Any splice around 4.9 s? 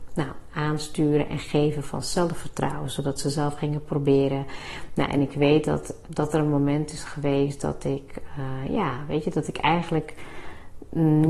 yes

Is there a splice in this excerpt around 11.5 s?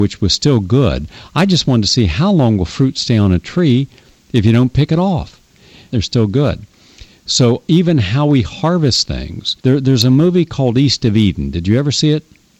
no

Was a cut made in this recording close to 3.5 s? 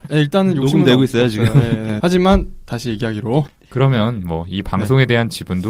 yes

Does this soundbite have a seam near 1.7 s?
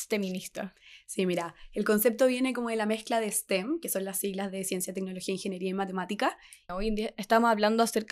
no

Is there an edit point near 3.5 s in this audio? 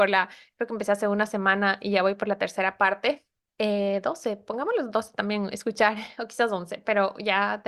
yes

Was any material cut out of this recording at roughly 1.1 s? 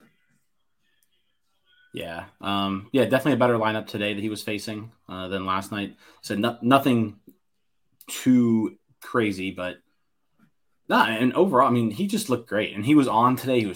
no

